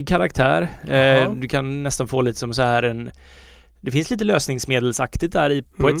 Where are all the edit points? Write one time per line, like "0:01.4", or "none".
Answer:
none